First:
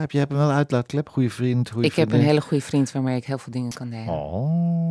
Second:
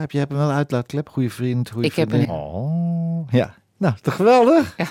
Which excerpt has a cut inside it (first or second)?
second